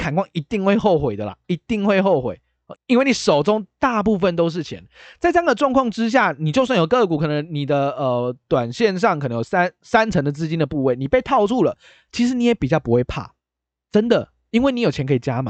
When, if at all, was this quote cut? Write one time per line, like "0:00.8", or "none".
0:02.7